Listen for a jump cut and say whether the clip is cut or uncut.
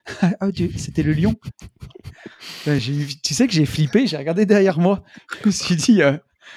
uncut